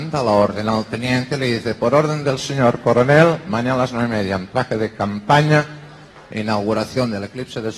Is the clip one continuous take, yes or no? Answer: yes